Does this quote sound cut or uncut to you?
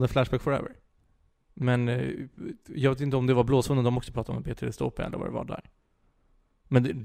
cut